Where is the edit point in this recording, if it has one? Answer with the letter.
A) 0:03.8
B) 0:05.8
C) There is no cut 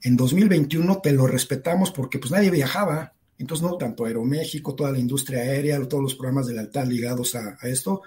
A